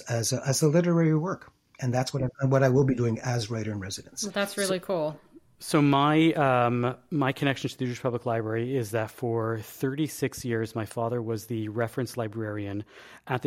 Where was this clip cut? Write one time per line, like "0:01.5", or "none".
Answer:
none